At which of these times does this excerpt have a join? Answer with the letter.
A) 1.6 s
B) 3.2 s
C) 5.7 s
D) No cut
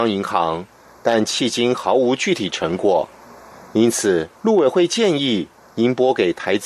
C